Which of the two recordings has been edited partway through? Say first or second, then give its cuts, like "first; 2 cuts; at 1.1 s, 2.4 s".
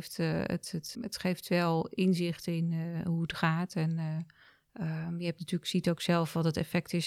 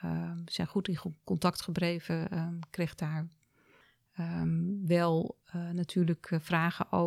first; 1 cut; at 0.9 s